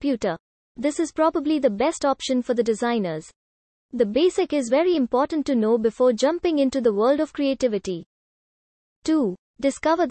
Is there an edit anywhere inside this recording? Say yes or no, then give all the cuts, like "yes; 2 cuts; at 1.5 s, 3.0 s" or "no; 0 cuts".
no; 0 cuts